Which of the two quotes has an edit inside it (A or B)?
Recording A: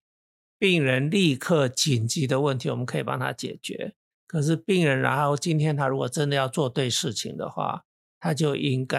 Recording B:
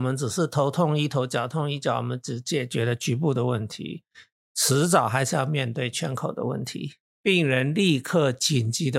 B